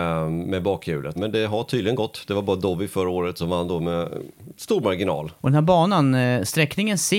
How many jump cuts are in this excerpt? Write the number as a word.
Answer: two